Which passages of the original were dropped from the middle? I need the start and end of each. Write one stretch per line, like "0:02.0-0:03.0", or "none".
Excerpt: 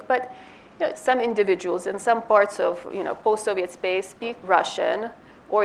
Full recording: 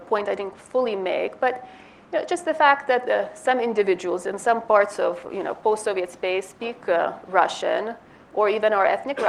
0:02.3-0:03.3
0:06.8-0:07.3